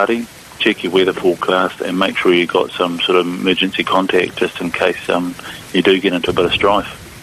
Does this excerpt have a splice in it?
no; 0 cuts

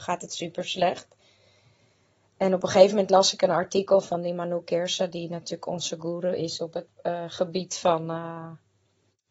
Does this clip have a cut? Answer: yes; 1 cut; at 6.9 s

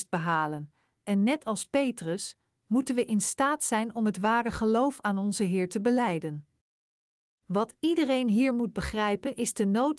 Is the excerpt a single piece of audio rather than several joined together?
yes; 0 cuts

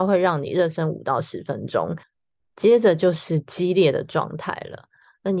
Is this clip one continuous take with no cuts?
yes; 0 cuts

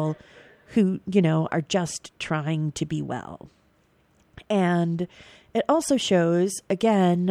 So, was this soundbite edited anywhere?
no; 0 cuts

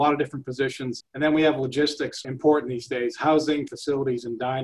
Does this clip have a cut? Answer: yes; 3 cuts; at 1.0 s, 2.2 s, 3.7 s

